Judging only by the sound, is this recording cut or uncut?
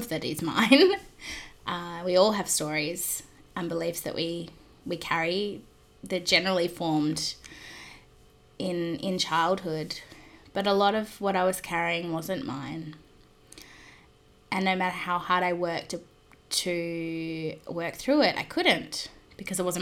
uncut